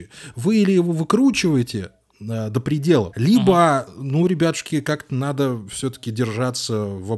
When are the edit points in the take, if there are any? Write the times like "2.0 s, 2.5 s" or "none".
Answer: 3.1 s